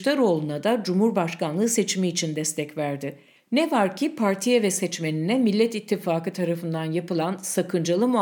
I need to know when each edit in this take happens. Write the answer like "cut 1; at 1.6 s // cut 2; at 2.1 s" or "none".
none